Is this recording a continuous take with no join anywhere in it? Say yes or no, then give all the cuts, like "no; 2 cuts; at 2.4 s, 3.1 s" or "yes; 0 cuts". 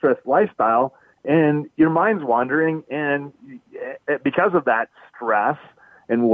yes; 0 cuts